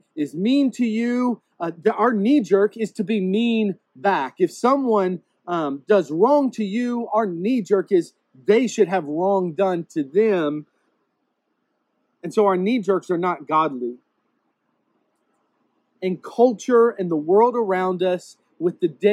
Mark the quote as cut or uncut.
uncut